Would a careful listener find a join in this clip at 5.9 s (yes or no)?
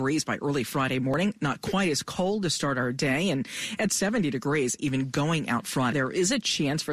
yes